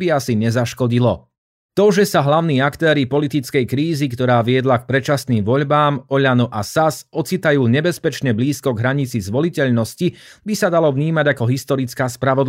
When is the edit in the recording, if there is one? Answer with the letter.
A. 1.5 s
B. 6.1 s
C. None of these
C